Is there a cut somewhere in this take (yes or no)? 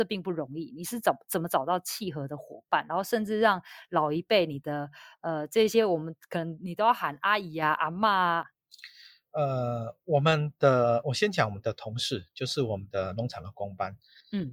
yes